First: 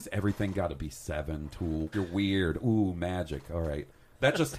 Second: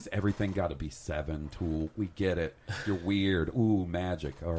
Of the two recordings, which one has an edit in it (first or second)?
first